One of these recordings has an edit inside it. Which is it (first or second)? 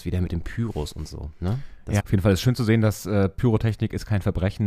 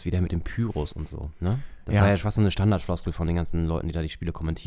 first